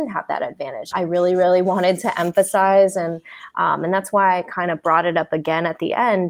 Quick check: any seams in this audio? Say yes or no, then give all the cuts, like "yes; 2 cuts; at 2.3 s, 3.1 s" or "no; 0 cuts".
yes; 1 cut; at 0.9 s